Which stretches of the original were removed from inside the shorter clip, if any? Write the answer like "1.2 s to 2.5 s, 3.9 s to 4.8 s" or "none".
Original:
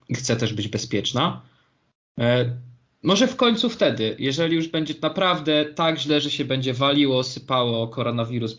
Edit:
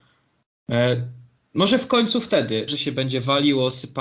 4.2 s to 6.2 s